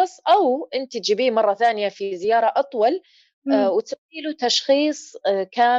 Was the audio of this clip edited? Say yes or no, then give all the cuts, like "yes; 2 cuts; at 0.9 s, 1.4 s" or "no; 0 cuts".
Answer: no; 0 cuts